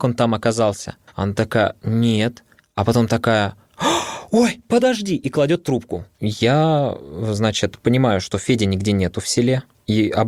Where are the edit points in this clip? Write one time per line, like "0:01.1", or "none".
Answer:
0:01.1
0:06.1